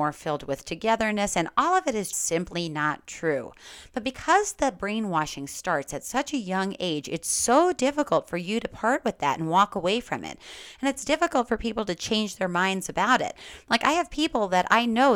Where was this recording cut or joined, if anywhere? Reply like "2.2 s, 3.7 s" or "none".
2.1 s